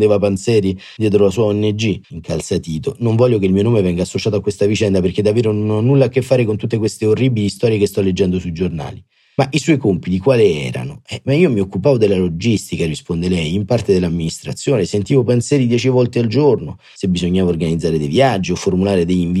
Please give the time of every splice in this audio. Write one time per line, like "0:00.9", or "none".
0:02.0